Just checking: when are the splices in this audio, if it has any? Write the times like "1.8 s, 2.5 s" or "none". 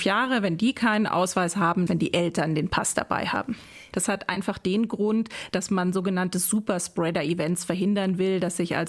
1.9 s, 3.9 s